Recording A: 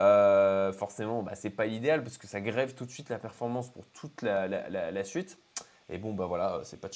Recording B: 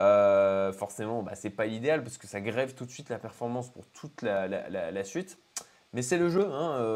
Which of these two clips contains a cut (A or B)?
A